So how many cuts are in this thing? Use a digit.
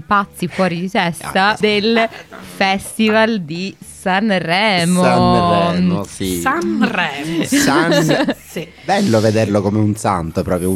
1